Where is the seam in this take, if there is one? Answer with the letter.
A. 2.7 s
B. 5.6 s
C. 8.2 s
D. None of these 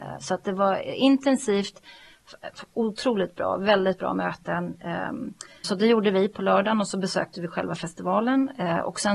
B